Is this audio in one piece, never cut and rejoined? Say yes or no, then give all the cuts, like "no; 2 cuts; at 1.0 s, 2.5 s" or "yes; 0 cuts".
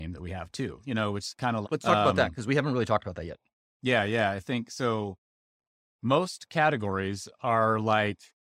no; 1 cut; at 1.6 s